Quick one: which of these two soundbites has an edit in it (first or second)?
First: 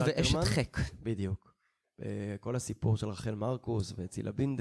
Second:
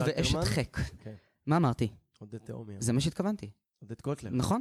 second